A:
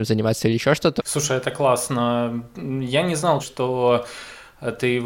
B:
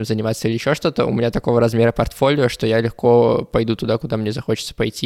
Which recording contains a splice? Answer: A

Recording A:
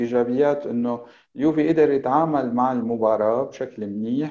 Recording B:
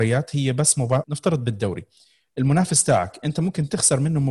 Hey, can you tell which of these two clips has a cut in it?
B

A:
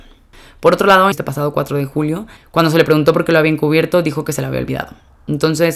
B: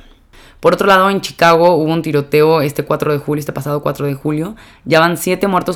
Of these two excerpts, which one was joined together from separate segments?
A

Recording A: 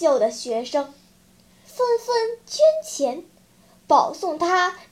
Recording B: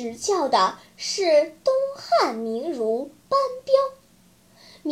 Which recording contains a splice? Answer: A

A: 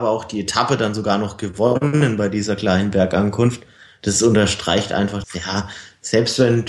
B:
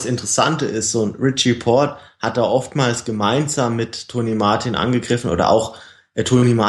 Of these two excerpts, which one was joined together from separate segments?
A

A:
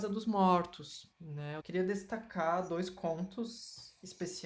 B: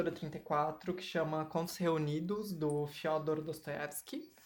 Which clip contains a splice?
A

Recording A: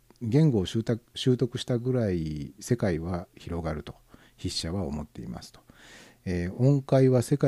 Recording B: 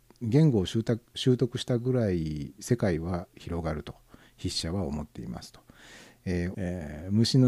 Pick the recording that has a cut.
B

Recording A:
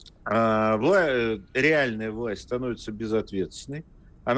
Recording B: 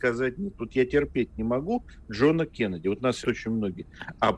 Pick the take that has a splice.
B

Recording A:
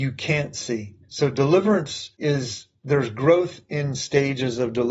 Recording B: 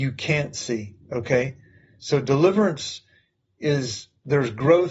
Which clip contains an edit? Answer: A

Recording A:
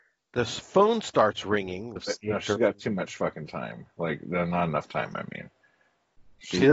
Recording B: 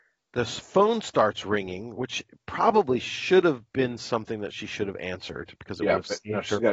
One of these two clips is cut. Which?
A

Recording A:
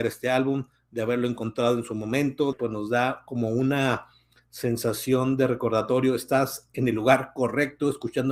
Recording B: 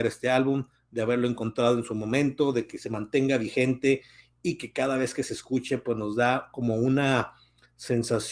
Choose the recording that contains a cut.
A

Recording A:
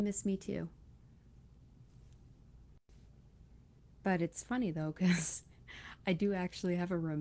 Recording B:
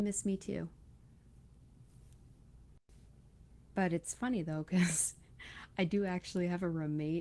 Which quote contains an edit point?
B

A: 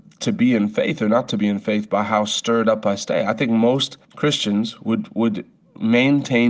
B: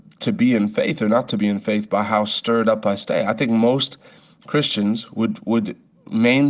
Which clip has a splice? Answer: A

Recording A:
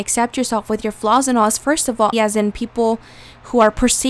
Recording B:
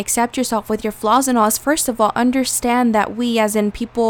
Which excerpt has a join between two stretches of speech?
A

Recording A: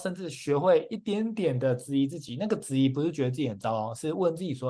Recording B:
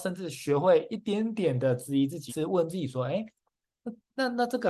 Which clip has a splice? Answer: B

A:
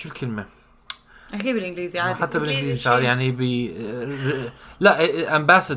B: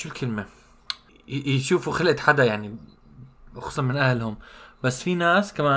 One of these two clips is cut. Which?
B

